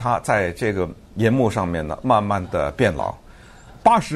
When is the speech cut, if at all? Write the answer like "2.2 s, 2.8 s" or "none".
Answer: 1.0 s